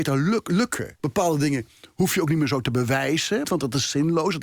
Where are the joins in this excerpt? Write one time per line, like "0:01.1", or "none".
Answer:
0:01.0
0:03.4